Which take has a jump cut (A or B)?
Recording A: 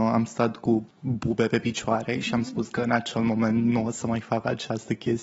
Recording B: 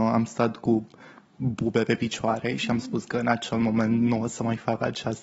A